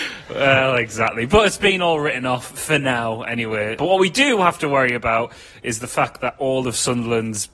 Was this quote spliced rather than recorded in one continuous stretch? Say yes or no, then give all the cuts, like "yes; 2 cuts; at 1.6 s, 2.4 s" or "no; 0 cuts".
yes; 1 cut; at 3.8 s